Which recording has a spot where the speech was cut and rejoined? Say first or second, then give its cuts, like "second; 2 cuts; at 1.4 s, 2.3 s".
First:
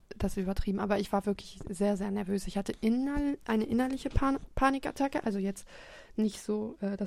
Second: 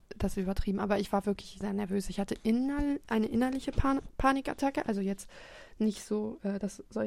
second; 1 cut; at 1.6 s